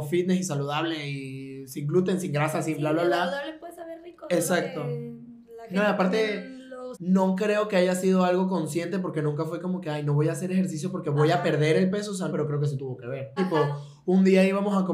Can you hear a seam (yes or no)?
yes